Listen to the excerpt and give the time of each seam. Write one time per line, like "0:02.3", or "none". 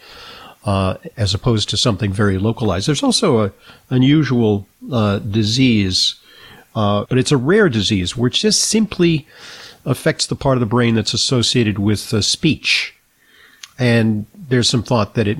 0:07.1